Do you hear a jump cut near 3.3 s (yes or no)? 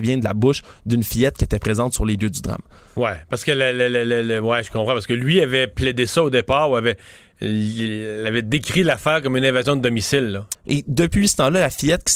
no